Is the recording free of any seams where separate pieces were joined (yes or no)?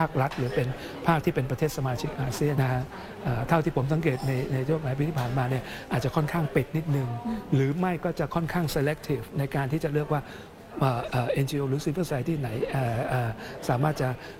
no